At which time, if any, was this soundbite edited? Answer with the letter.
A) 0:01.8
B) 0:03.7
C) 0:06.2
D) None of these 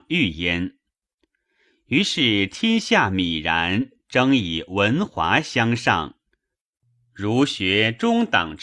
D